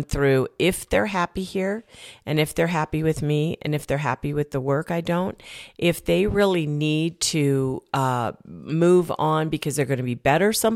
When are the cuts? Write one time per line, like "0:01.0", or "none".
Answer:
none